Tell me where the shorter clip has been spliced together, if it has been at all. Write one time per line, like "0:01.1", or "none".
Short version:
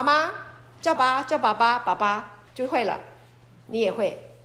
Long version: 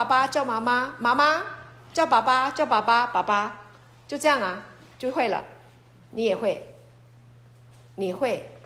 0:01.0
0:02.5

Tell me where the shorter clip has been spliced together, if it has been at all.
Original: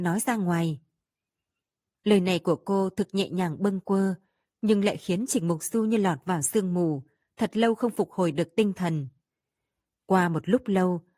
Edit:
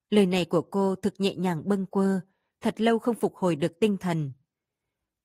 0:02.6

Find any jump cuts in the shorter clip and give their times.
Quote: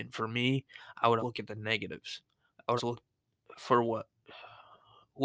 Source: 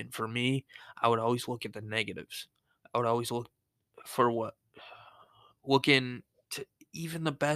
0:01.2
0:02.8

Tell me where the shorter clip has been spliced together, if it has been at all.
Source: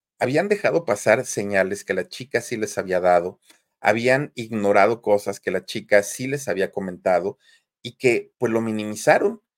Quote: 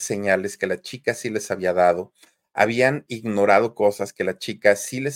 none

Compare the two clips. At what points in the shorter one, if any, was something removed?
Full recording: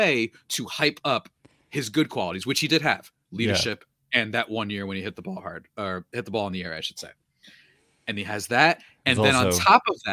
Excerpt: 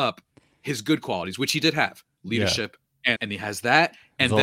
0:03.2

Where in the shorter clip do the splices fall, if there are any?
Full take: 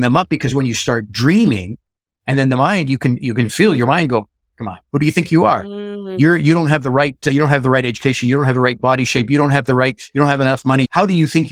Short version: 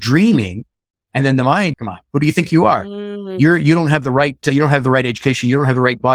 0:01.7

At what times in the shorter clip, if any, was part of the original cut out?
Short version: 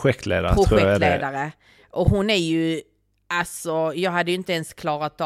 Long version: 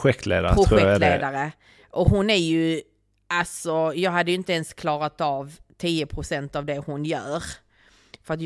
none

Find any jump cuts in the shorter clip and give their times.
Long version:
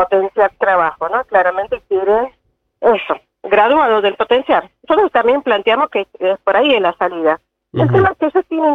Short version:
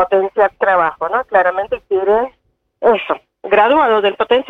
none

